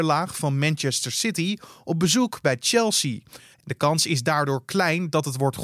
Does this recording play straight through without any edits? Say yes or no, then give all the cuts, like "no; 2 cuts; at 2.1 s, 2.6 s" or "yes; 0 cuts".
no; 1 cut; at 3.5 s